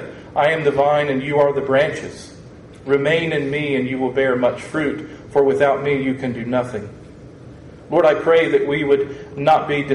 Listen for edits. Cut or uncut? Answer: uncut